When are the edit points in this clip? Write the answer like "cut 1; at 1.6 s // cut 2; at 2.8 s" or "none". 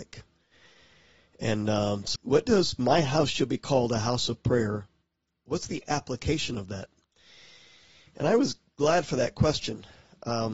cut 1; at 2.2 s